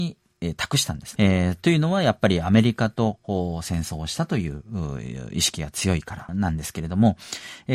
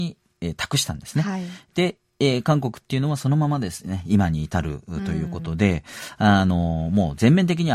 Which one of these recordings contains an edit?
first; 2 cuts; at 1.2 s, 6.3 s

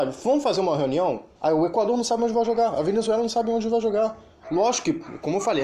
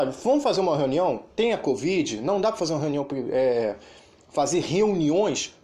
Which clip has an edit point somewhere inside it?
first; 2 cuts; at 1.4 s, 4.4 s

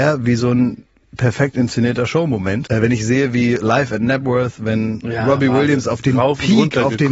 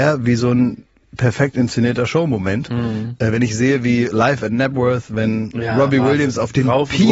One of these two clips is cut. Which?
first; 1 cut; at 2.7 s

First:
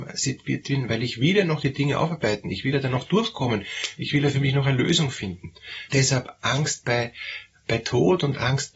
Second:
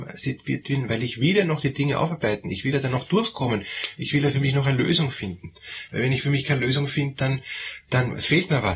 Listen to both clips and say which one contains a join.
first; 1 cut; at 5.9 s

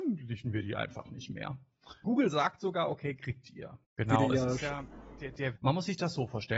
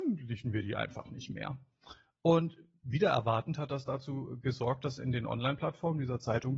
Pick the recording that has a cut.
first; 3 cuts; at 2.0 s, 3.8 s, 5.6 s

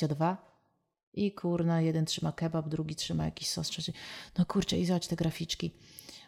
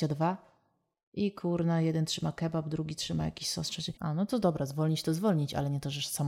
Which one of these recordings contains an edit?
second; 1 cut; at 3.9 s

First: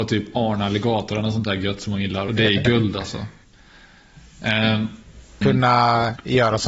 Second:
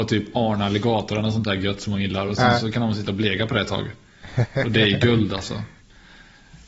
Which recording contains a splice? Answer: first; 2 cuts; at 2.3 s, 5.4 s

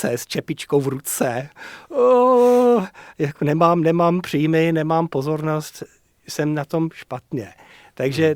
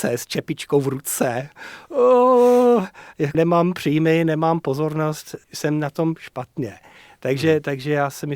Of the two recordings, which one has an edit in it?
second; 2 cuts; at 3.3 s, 5.4 s

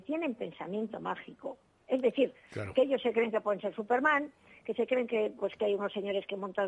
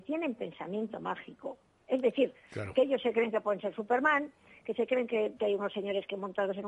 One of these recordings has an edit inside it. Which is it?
second; 1 cut; at 5.4 s

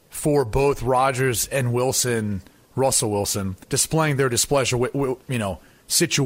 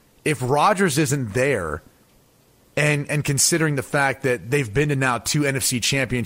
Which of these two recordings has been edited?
first; 2 cuts; at 3.6 s, 5.2 s

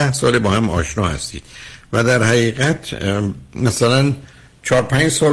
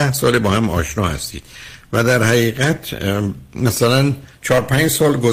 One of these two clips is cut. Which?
second; 1 cut; at 4.3 s

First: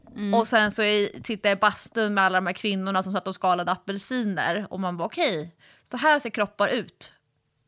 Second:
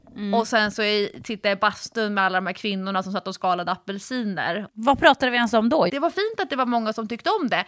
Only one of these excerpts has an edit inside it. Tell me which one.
second; 2 cuts; at 4.7 s, 5.9 s

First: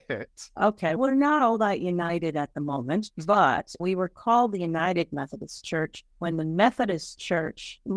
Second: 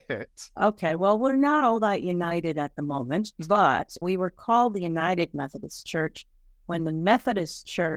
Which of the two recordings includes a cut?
first; 2 cuts; at 1.0 s, 6.1 s

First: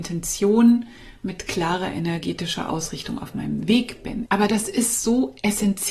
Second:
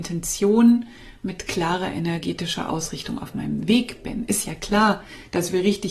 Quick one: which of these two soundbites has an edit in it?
first; 1 cut; at 4.3 s

